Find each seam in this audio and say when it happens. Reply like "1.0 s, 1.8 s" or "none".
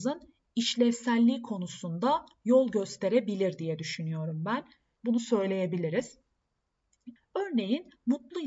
5.0 s, 7.2 s